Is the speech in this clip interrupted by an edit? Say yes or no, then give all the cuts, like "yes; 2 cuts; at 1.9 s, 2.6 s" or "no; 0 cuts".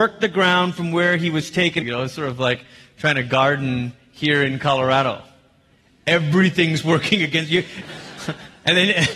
yes; 2 cuts; at 1.8 s, 7.8 s